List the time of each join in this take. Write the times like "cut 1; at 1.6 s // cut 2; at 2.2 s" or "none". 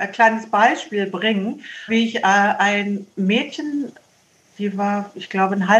cut 1; at 1.9 s